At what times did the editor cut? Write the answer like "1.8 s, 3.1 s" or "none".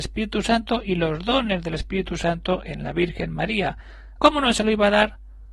4.1 s